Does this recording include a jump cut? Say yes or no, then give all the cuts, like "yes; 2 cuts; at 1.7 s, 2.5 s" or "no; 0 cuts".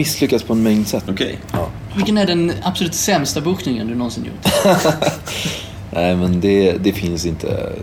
yes; 1 cut; at 1.1 s